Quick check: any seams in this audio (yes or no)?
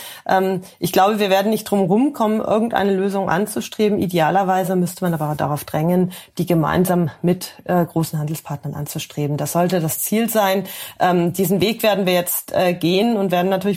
no